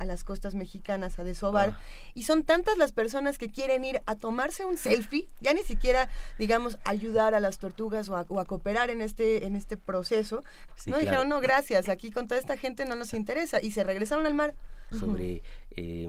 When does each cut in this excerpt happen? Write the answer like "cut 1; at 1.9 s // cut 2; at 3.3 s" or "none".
cut 1; at 10.7 s // cut 2; at 14.9 s